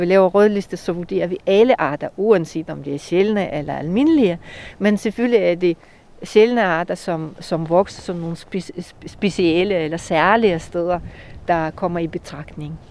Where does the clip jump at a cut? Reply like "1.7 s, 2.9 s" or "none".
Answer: none